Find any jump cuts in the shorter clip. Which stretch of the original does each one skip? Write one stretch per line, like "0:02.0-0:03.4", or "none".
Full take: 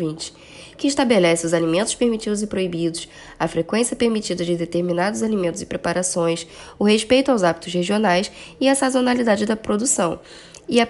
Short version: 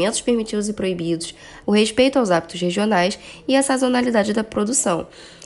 0:03.4-0:06.7